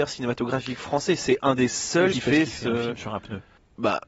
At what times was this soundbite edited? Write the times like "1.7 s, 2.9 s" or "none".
2.1 s